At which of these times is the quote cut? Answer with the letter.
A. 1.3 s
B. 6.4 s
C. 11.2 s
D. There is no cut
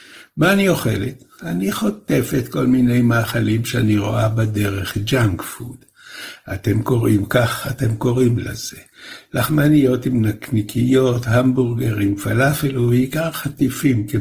D